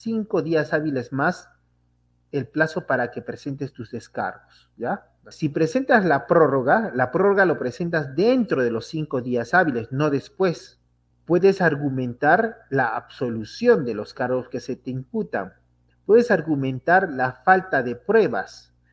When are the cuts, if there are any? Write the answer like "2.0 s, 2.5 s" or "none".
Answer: 5.3 s, 11.1 s, 15.9 s